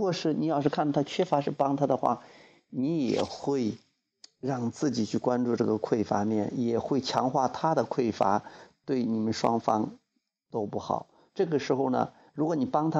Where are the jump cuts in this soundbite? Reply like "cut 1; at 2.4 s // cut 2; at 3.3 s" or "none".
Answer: cut 1; at 11.3 s